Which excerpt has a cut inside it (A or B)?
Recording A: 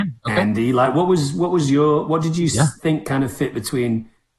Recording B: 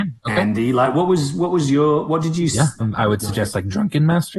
B